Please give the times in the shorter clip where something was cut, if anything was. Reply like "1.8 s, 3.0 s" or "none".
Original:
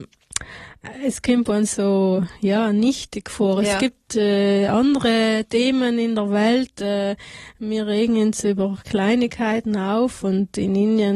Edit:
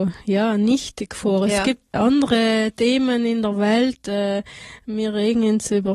1.9 s